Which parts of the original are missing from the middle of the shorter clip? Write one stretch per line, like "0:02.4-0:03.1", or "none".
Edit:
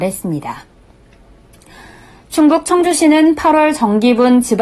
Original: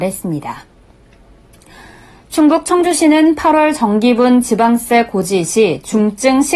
none